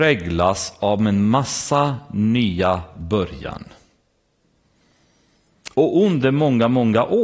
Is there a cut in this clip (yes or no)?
yes